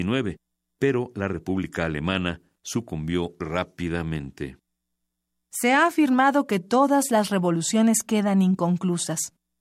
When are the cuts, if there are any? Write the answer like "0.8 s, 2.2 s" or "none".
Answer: 3.4 s